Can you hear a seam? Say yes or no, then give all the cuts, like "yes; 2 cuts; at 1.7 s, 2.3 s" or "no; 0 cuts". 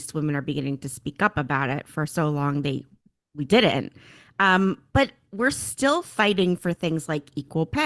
no; 0 cuts